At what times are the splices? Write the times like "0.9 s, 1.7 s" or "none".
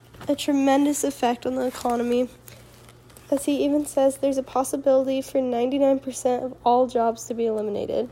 none